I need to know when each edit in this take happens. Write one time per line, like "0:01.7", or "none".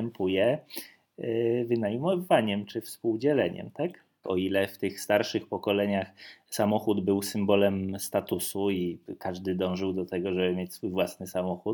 0:04.2